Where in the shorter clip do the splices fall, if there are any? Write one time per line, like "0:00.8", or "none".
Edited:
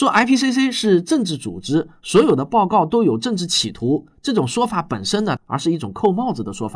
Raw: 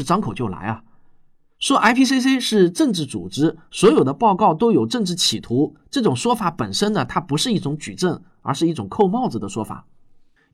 0:05.4

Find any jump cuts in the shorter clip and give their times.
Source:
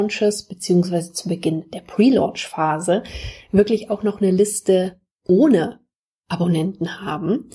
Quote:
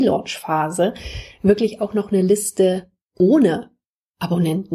none

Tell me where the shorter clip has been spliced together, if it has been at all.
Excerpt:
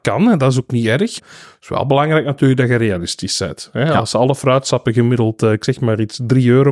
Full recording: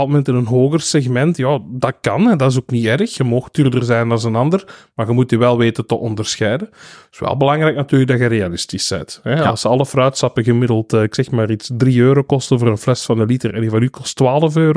0:01.2

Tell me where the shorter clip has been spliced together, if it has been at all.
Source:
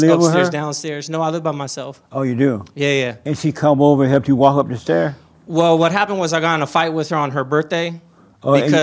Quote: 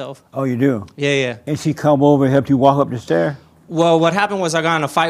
none

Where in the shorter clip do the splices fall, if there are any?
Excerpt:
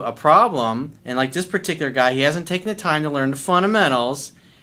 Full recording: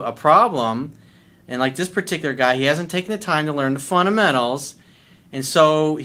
0:01.0

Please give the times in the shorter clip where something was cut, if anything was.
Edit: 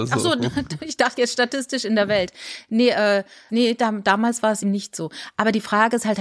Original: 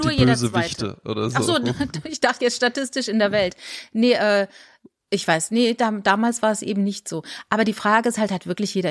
0:03.5
0:04.6

